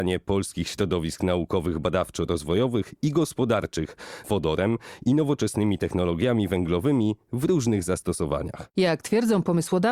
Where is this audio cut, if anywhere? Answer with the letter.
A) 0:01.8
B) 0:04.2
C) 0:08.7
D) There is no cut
B